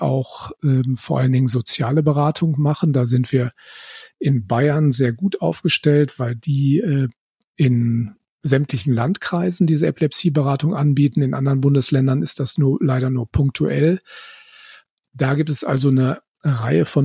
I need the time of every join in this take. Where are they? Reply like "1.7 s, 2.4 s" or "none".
none